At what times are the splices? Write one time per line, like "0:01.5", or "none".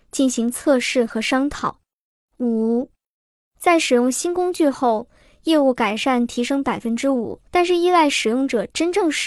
0:02.3
0:07.5